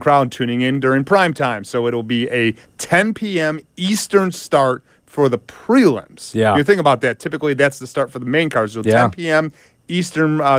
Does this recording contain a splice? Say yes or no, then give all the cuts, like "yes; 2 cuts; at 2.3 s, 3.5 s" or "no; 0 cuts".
no; 0 cuts